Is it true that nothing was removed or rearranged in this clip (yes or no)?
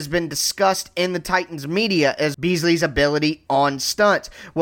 no